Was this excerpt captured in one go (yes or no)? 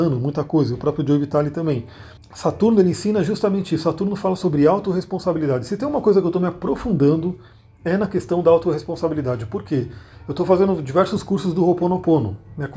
no